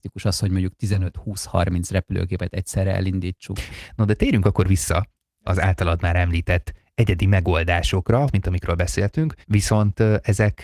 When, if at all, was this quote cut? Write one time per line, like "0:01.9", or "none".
0:03.7
0:08.3
0:09.4